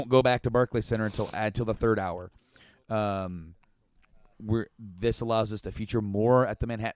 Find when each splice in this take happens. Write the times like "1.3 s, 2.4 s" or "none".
4.3 s